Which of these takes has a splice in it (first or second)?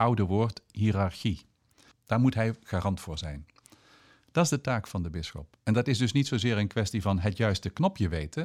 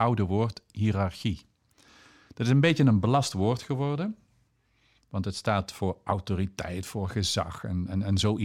first